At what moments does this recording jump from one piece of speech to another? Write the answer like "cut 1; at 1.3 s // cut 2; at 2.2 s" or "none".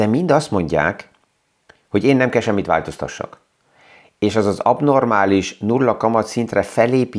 none